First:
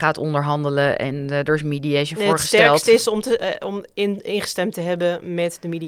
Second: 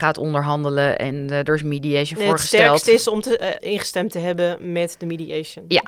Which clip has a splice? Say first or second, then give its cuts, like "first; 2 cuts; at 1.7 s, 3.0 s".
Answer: second; 1 cut; at 3.6 s